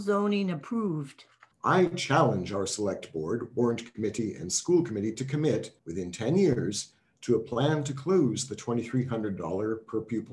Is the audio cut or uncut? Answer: cut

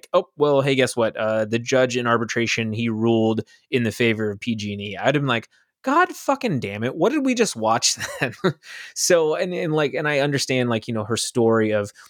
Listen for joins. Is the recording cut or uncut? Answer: uncut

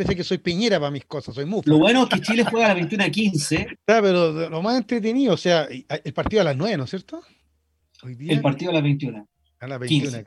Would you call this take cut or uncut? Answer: cut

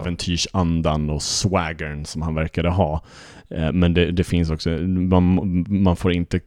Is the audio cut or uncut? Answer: uncut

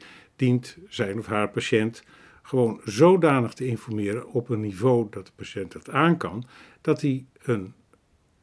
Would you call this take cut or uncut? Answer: uncut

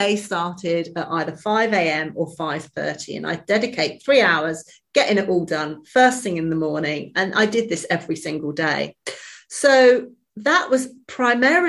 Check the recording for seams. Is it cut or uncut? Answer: uncut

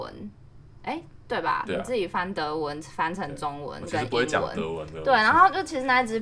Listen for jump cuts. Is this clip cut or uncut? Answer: uncut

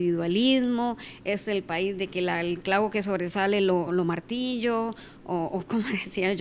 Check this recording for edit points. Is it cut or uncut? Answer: cut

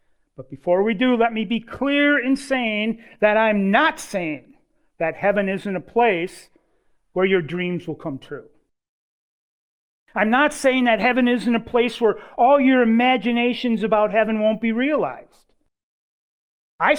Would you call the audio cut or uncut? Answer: uncut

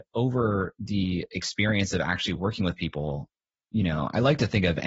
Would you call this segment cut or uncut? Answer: uncut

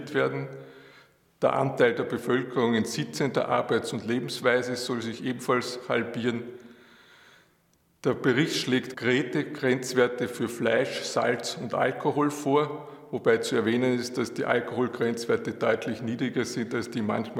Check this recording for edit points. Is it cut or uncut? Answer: cut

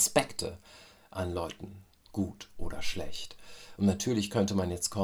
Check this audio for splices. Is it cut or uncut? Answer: cut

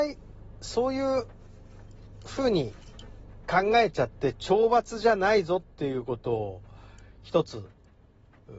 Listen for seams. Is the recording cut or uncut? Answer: uncut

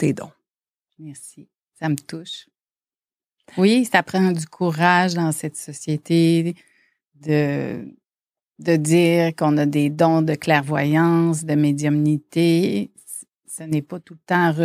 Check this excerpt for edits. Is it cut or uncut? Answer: uncut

